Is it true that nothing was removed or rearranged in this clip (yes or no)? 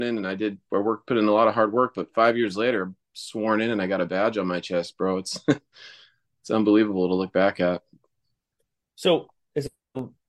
yes